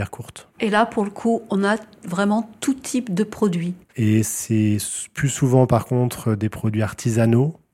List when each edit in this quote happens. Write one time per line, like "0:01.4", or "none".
0:03.9